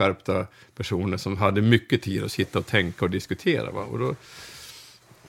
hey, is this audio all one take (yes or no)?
yes